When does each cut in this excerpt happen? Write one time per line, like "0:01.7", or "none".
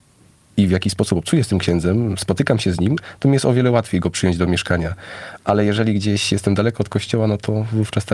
none